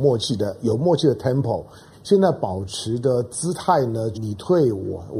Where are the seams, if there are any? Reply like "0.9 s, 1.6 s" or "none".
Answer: 1.9 s, 4.1 s